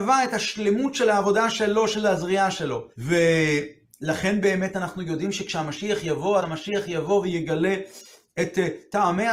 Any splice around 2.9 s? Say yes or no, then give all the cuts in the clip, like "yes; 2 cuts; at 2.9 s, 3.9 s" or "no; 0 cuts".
yes; 2 cuts; at 2.9 s, 6.4 s